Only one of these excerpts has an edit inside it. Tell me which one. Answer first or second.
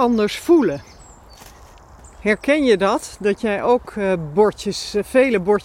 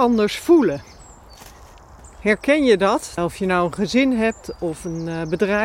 second